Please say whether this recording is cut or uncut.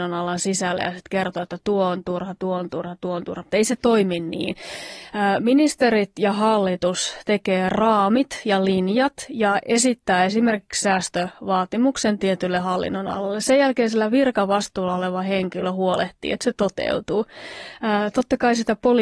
uncut